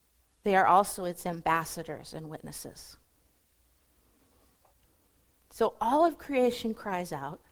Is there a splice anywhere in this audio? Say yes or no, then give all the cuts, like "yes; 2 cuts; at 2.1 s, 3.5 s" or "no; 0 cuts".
no; 0 cuts